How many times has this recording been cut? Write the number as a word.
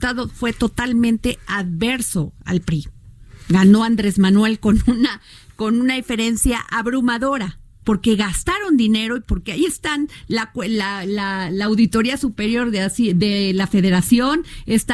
one